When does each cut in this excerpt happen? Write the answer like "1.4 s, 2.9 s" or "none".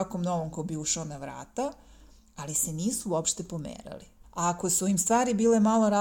4.2 s